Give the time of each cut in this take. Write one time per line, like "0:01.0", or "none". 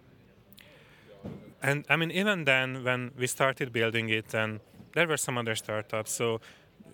0:01.5